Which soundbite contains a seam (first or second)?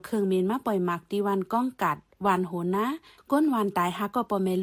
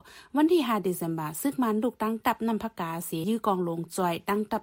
second